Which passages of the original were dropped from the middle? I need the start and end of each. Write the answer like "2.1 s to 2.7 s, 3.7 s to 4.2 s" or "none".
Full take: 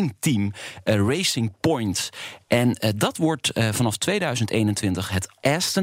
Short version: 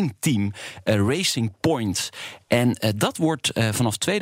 none